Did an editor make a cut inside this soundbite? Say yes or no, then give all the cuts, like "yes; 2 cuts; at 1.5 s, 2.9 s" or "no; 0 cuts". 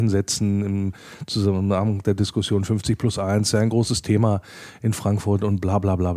no; 0 cuts